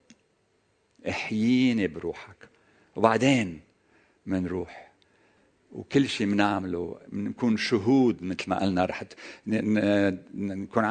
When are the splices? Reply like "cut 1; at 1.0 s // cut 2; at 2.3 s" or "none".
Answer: none